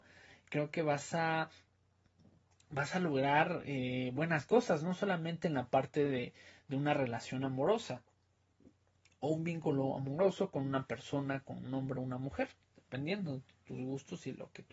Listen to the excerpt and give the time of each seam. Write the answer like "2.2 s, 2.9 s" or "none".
none